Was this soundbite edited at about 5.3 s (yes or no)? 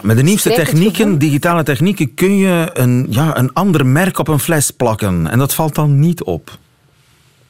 no